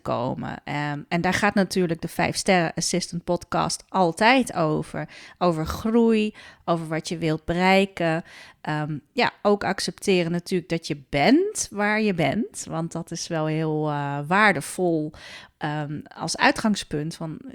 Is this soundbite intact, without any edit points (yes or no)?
yes